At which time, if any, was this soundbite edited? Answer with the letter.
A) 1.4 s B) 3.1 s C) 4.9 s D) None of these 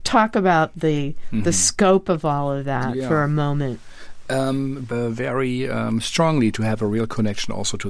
C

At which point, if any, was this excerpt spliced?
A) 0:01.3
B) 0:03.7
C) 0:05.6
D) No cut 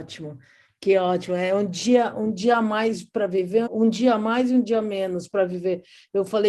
B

